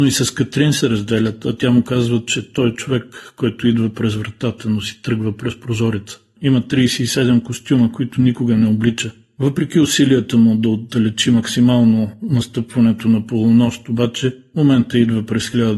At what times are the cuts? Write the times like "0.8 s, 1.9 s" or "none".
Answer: 6.4 s